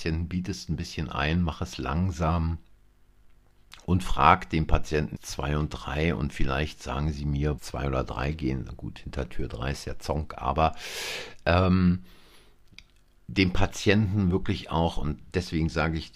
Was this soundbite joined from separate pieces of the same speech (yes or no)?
yes